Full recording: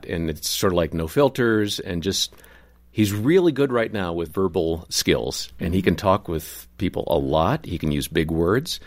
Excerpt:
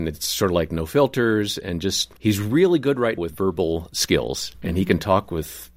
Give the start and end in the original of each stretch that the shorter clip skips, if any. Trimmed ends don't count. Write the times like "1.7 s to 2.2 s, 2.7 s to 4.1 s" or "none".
2.4 s to 2.9 s, 3.9 s to 4.1 s